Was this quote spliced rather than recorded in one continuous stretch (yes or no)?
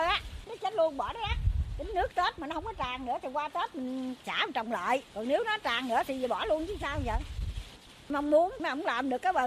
yes